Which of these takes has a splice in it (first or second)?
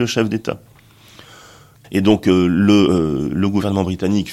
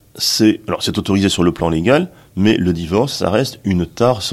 first